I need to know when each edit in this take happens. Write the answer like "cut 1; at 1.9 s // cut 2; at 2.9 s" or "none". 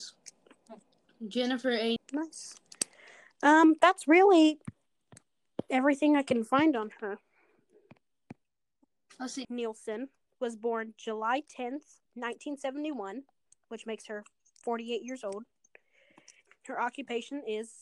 cut 1; at 2.0 s // cut 2; at 9.4 s // cut 3; at 16.5 s